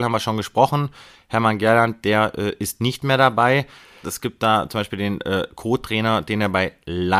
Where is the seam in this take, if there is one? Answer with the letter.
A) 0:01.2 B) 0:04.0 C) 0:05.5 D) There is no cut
B